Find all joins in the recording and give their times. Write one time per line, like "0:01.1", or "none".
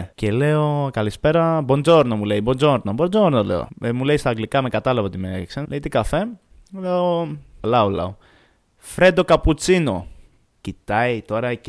0:05.6
0:07.6
0:10.6